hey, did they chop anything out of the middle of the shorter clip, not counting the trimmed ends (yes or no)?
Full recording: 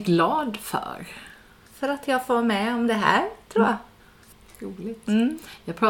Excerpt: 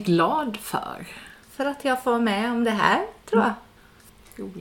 yes